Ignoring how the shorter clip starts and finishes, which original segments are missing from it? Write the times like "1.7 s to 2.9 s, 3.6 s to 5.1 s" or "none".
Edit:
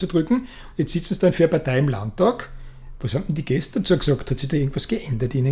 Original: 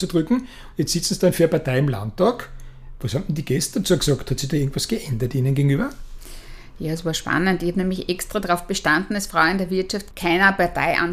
none